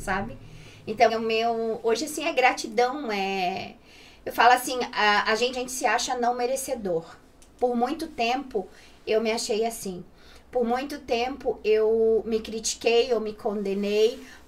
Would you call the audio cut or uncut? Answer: cut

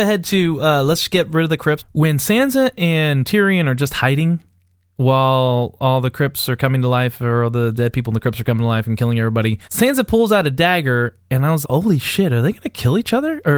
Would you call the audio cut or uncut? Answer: cut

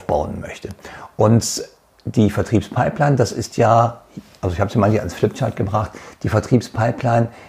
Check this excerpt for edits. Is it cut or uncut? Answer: uncut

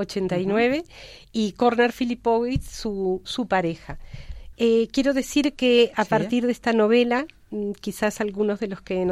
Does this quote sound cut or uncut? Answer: cut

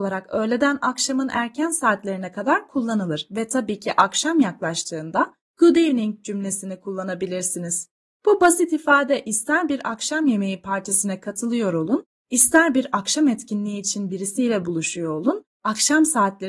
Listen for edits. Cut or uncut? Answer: uncut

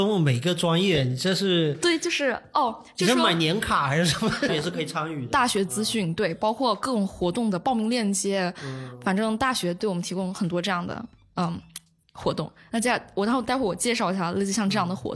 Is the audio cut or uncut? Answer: cut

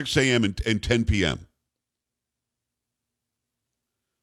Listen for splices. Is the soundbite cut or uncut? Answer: uncut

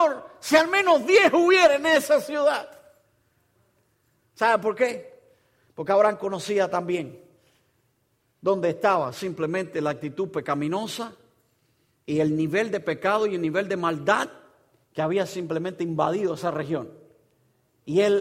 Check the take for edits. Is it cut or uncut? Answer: uncut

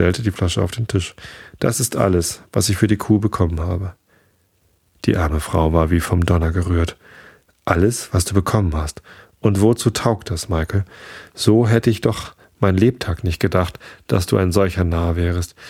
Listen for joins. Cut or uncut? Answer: uncut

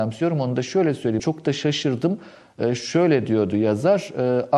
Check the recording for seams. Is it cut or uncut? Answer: cut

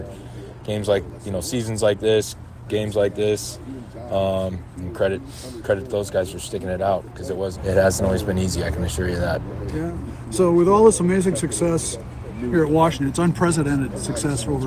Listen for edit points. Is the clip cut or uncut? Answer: cut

